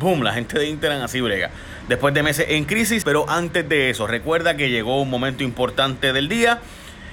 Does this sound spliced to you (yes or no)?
yes